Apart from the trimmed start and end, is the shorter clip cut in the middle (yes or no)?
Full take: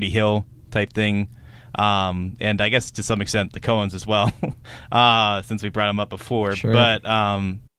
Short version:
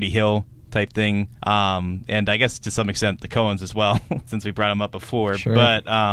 yes